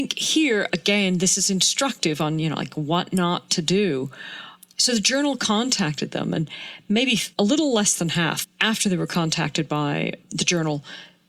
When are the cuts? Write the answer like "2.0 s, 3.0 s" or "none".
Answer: 7.3 s, 8.4 s, 10.2 s